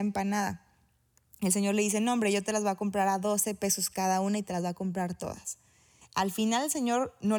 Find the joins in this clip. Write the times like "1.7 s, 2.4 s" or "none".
6.0 s